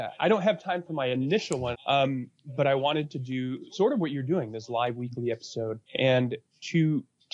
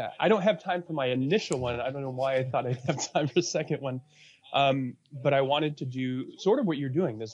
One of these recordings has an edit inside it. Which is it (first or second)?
first